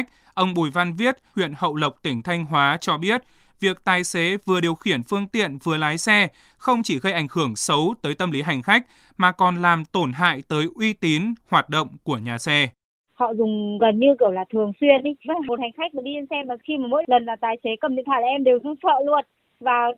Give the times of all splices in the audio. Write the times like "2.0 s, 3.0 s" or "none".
1.3 s, 13.1 s, 15.2 s